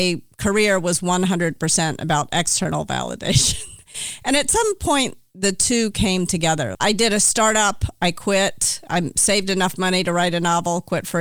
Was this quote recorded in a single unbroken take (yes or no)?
no